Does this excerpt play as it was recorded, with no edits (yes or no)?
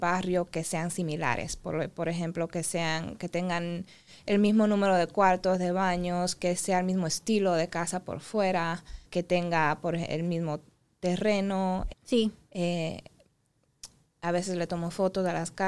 no